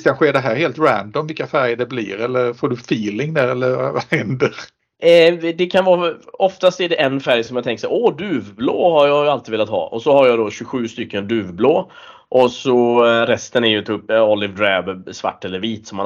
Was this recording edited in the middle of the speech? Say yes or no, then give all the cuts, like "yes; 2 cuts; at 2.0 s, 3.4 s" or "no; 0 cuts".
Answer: no; 0 cuts